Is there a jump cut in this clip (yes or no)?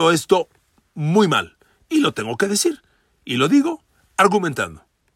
no